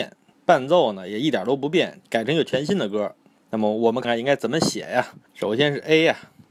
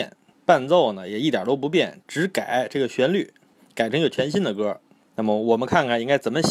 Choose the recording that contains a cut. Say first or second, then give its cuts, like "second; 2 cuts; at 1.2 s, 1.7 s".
first; 3 cuts; at 2.0 s, 4.0 s, 5.3 s